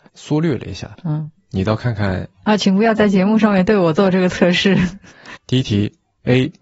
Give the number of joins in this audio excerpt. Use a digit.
2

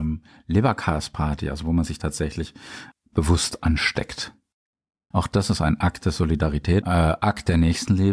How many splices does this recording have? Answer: 2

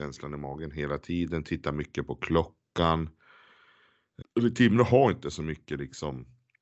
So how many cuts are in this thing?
1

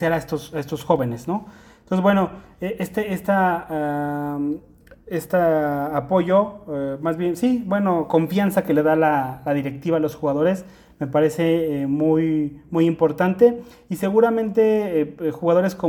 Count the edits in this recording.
0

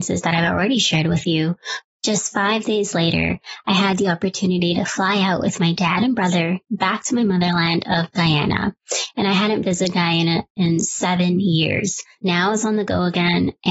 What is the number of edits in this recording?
2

